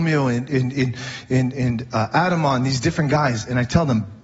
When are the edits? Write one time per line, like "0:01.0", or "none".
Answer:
none